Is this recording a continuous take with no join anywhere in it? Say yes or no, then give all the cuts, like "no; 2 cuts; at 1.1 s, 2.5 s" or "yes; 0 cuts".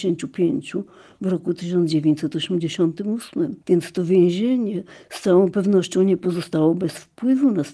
no; 1 cut; at 3.6 s